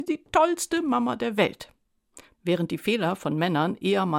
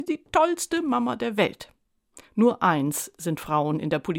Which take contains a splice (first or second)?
first